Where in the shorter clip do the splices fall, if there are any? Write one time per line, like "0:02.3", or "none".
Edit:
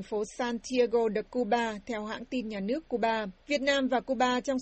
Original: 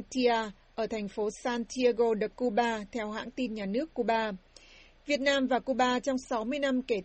0:03.4